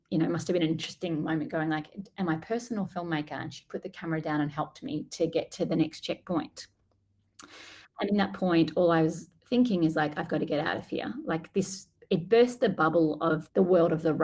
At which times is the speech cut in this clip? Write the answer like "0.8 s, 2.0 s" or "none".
none